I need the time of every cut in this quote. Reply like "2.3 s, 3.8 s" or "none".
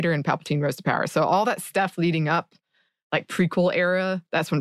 none

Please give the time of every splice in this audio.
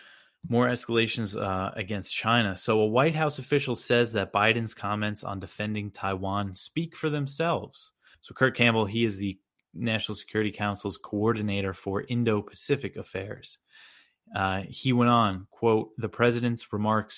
8.1 s

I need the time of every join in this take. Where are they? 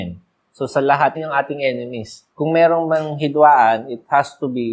1.1 s, 2.3 s

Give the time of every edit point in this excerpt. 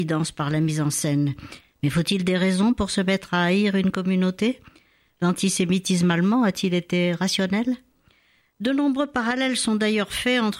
1.6 s

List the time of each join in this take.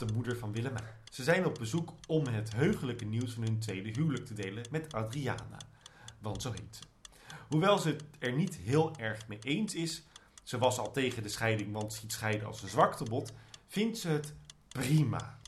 none

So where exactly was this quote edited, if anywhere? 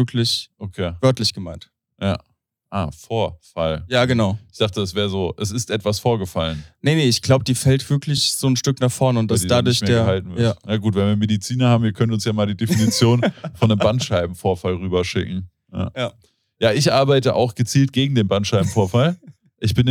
none

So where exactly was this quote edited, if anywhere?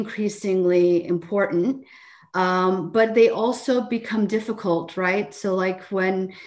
none

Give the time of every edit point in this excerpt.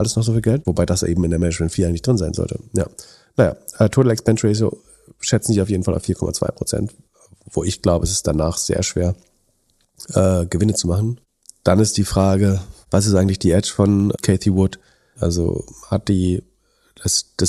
15.1 s

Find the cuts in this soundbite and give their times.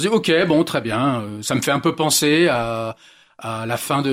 none

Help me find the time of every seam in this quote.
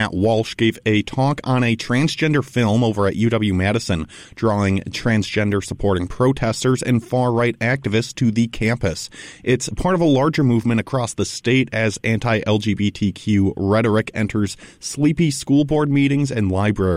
none

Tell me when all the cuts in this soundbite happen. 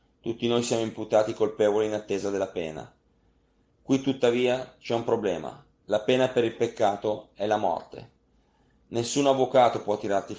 5.7 s

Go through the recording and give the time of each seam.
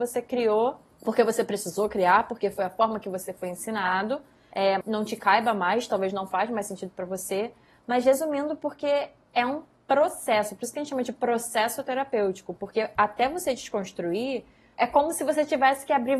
4.8 s

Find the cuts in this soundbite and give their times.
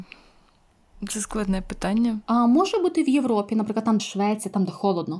2.2 s, 4.0 s

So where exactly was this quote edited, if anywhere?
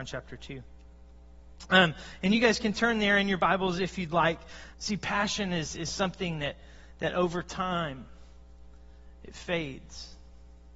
4.7 s

